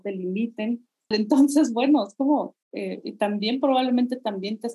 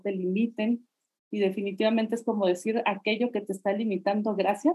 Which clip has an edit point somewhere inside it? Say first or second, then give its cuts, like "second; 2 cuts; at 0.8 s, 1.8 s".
first; 2 cuts; at 1.1 s, 2.6 s